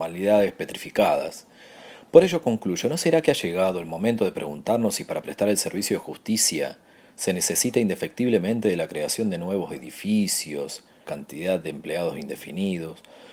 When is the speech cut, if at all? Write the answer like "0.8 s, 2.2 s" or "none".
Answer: 11.0 s